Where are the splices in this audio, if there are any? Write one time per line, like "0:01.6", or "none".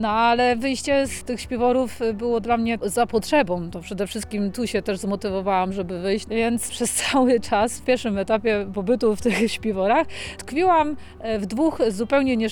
0:06.2